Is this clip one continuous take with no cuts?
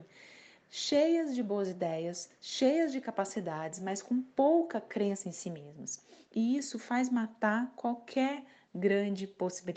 yes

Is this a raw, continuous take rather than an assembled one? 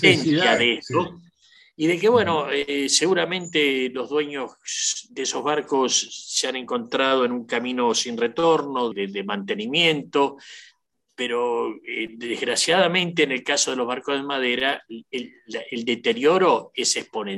no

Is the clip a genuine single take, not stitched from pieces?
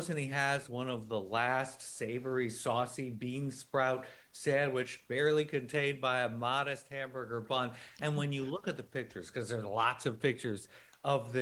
yes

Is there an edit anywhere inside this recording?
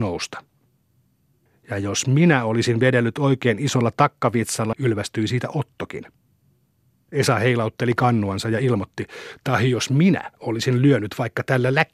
yes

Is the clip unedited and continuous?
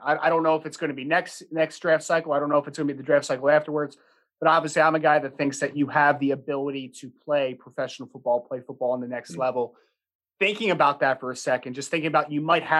yes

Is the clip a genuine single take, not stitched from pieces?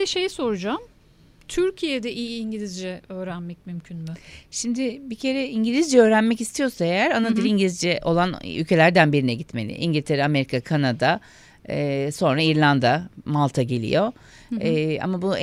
yes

